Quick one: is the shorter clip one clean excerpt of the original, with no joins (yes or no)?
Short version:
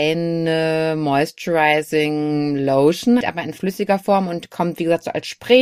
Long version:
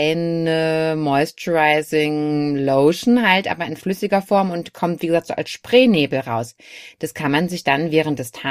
no